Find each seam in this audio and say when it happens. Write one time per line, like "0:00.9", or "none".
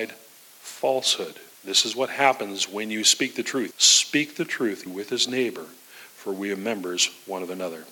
0:01.5
0:03.7
0:04.9